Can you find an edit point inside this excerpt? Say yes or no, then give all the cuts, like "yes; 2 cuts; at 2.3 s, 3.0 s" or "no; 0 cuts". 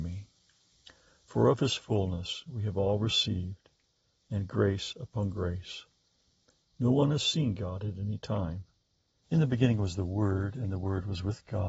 yes; 2 cuts; at 6.6 s, 9.2 s